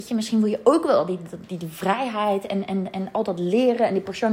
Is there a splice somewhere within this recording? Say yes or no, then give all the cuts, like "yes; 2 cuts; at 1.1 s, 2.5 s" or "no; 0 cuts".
no; 0 cuts